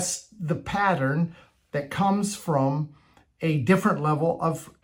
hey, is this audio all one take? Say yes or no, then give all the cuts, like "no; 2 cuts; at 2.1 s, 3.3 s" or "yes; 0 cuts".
yes; 0 cuts